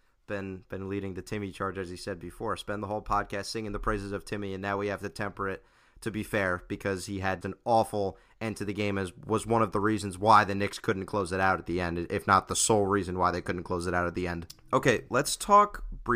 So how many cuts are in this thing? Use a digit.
1